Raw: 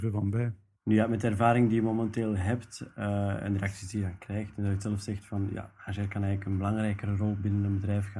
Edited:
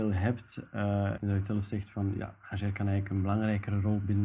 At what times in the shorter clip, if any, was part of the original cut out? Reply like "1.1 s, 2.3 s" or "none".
1.2 s

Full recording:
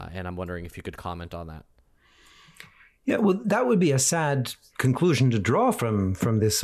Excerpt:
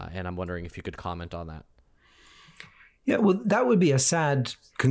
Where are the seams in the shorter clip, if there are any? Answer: none

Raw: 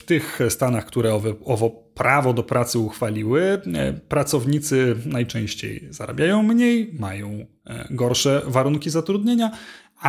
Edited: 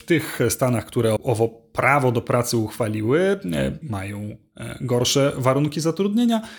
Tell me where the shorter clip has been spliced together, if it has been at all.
1.2 s, 3.8 s

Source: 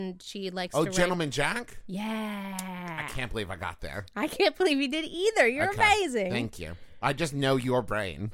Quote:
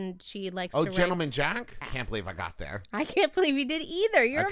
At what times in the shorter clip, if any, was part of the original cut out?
1.8 s

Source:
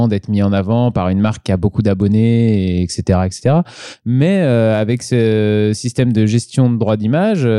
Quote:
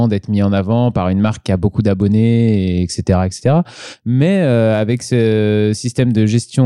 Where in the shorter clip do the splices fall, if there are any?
none

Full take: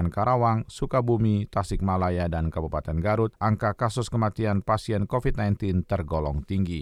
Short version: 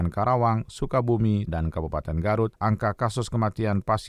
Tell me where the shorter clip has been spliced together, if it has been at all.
1.5 s

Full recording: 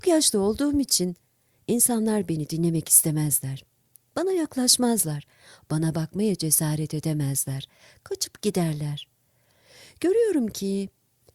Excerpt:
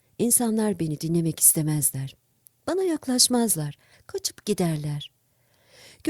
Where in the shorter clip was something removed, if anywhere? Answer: 3.9 s

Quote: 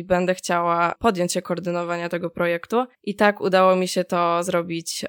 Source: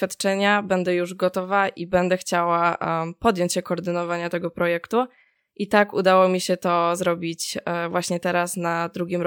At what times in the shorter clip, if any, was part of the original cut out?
0.9 s, 2.9 s

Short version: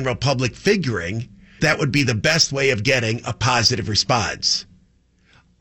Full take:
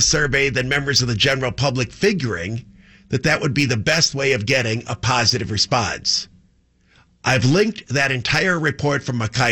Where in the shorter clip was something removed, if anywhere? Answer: 1.6 s

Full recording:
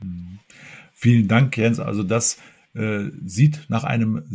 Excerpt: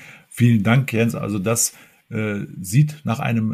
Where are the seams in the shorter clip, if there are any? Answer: none

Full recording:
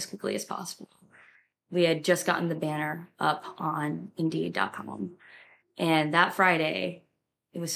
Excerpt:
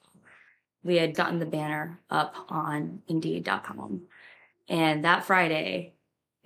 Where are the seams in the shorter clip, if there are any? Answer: 1.1 s

